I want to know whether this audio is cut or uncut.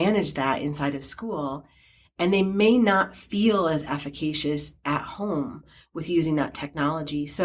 uncut